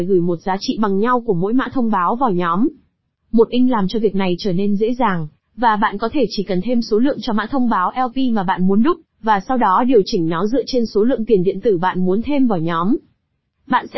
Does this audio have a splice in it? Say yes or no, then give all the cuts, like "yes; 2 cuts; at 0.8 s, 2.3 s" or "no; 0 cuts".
no; 0 cuts